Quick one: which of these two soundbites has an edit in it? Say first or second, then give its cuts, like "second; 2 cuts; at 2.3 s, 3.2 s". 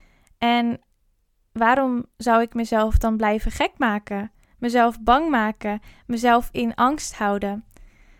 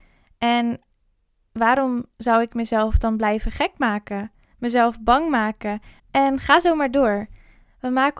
second; 1 cut; at 6.0 s